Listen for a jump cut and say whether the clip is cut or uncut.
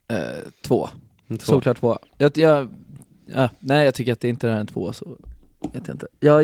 uncut